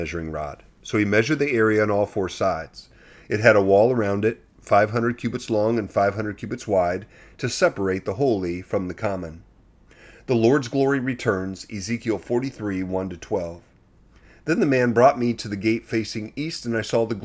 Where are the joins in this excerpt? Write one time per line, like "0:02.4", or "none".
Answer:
none